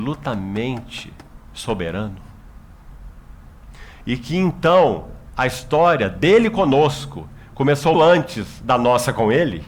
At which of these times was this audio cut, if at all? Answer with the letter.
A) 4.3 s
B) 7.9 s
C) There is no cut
B